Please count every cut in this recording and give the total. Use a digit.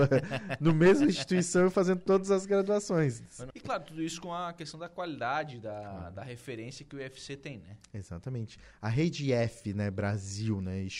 1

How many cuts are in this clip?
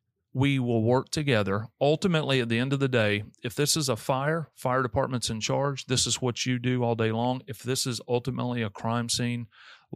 0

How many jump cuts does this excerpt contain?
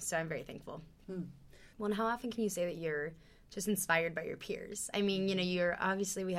1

